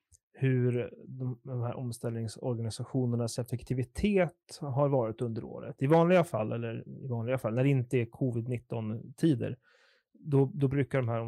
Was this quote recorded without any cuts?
yes; 0 cuts

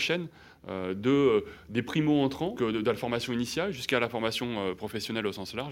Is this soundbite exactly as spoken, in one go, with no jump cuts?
no; 1 cut; at 2.6 s

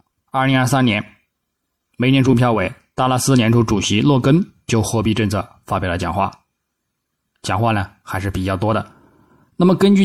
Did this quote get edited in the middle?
no; 0 cuts

